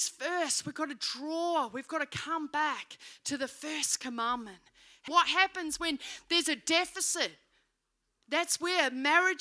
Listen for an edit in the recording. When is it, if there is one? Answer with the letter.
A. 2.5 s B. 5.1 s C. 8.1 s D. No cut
B